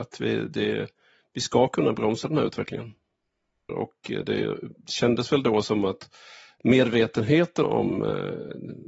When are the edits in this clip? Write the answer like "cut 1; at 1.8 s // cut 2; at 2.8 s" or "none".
cut 1; at 3.7 s // cut 2; at 7.6 s